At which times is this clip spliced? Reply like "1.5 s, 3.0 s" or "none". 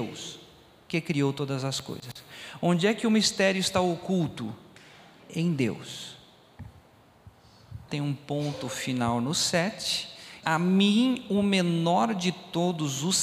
7.9 s, 10.4 s